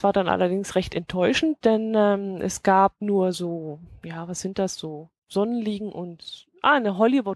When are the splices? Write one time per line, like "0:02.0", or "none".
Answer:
none